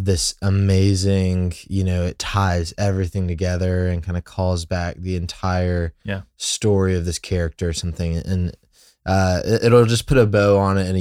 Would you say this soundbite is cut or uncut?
uncut